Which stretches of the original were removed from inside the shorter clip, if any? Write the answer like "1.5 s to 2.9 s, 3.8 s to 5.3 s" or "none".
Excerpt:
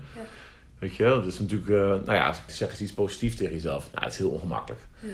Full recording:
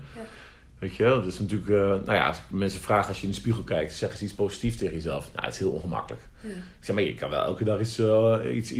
2.5 s to 3.9 s